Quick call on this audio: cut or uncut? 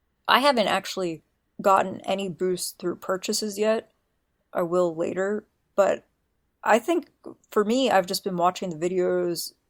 uncut